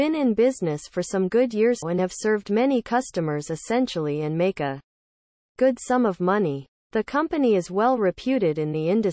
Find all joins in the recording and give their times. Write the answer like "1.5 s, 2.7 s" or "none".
1.8 s